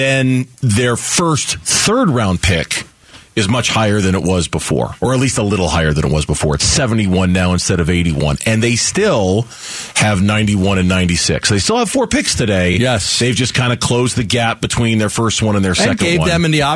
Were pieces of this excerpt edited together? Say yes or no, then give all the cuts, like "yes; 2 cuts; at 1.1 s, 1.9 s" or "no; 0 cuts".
no; 0 cuts